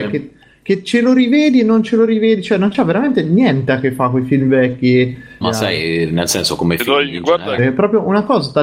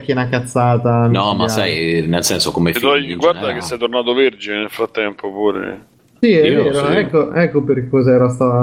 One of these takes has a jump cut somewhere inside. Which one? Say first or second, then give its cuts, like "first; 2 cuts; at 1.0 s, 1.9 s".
first; 2 cuts; at 5.4 s, 7.6 s